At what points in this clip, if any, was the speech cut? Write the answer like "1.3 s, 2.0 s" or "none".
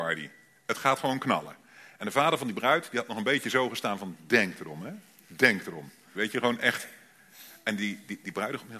6.1 s